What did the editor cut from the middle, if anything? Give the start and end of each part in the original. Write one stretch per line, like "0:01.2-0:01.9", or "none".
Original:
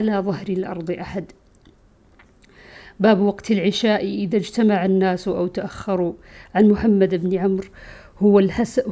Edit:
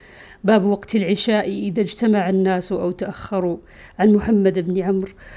none